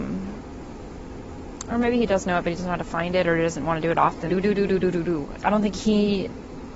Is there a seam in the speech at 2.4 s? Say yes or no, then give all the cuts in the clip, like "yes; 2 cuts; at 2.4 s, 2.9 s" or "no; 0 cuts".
no; 2 cuts; at 4.3 s, 5.4 s